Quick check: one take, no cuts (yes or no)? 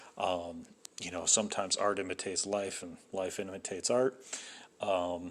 yes